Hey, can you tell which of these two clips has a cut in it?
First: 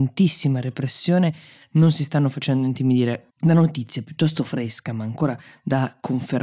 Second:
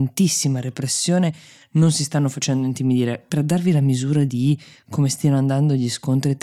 first; 1 cut; at 3.3 s

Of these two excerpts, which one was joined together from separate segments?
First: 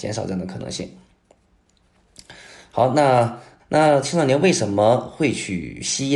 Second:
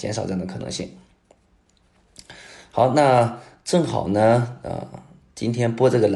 first; 1 cut; at 3.6 s

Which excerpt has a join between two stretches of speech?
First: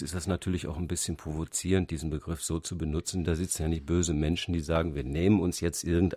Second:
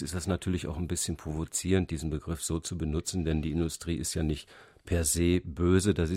first; 1 cut; at 3.2 s

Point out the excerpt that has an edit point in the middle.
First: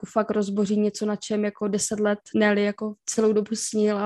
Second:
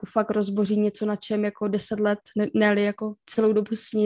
first; 1 cut; at 2.3 s

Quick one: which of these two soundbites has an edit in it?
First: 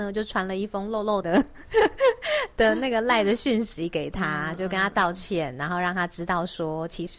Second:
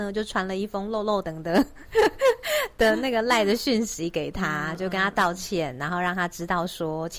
first; 1 cut; at 1.2 s

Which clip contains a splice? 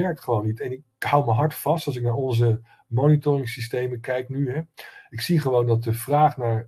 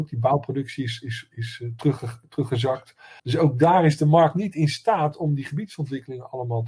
second; 1 cut; at 3.2 s

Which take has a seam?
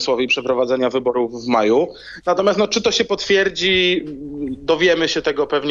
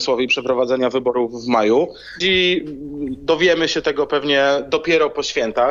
second; 1 cut; at 2.2 s

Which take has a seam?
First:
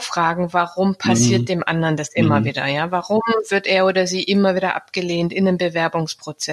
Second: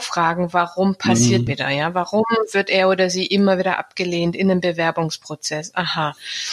second; 1 cut; at 1.5 s

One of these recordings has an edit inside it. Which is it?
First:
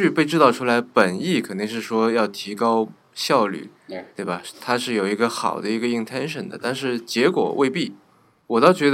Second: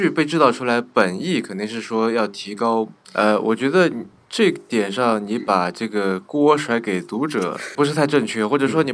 second; 2 cuts; at 3.0 s, 7.8 s

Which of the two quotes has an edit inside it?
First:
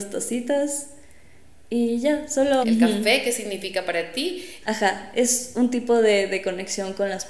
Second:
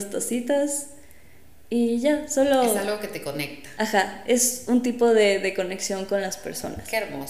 first; 2 cuts; at 2.6 s, 4.6 s

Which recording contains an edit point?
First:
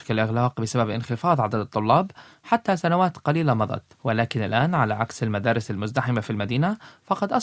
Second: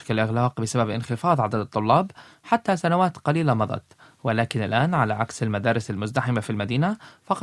first; 1 cut; at 3.9 s

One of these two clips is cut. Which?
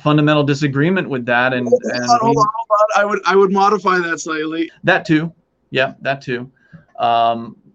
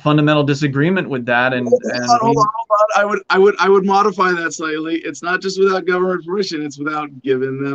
first; 2 cuts; at 3.2 s, 4.7 s

